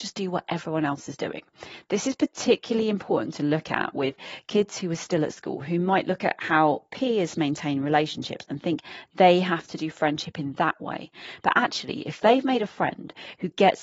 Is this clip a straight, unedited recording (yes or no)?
yes